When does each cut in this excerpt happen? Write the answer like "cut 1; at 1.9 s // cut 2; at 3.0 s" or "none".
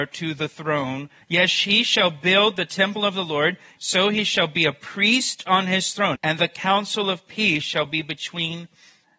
cut 1; at 1.2 s // cut 2; at 3.8 s // cut 3; at 6.1 s